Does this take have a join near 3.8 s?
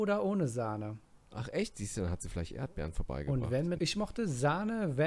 yes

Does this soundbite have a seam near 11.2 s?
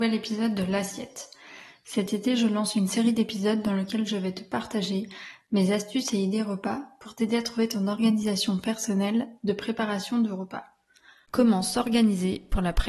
yes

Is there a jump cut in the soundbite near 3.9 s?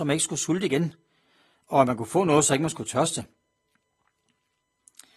no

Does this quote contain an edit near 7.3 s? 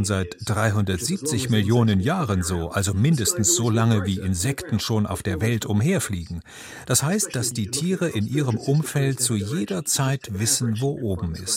no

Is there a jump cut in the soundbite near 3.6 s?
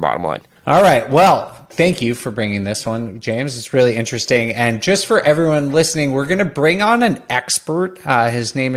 no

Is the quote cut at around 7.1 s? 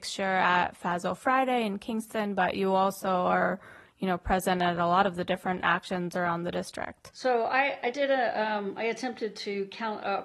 yes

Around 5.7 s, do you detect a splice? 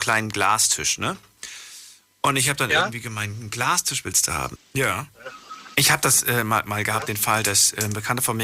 yes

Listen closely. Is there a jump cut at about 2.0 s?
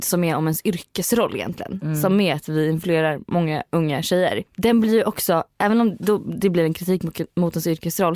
no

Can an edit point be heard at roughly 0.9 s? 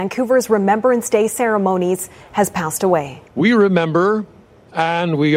no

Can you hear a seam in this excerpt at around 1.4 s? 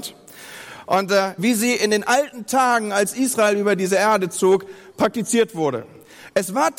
yes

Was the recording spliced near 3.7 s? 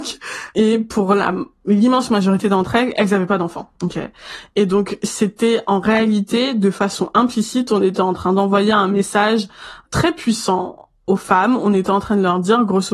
no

